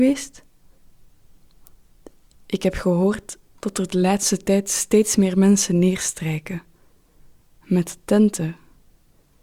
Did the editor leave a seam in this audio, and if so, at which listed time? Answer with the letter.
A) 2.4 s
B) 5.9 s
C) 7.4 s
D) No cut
D